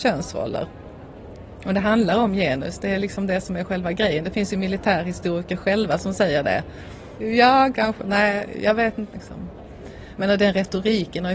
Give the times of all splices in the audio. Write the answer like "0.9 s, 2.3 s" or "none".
7.2 s, 9.1 s